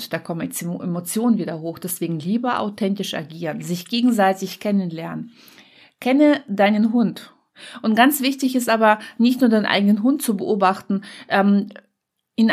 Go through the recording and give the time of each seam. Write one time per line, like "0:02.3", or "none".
none